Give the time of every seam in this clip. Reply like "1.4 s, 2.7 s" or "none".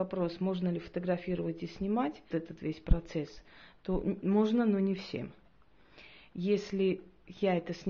2.3 s